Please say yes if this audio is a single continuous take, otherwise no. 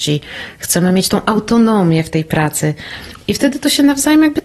yes